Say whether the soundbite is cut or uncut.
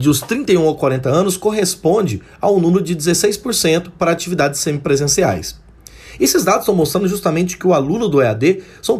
uncut